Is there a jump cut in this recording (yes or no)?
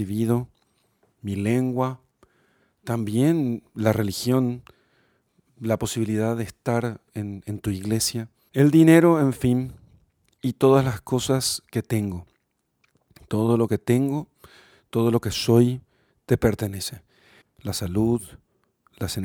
yes